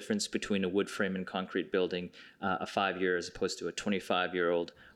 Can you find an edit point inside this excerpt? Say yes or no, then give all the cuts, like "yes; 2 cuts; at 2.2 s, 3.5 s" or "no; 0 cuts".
no; 0 cuts